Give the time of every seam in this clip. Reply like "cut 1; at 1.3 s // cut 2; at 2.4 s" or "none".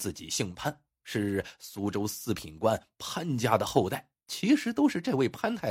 cut 1; at 4.2 s